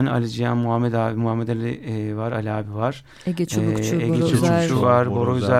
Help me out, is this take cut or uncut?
uncut